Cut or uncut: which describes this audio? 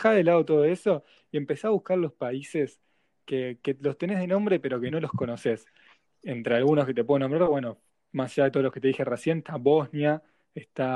cut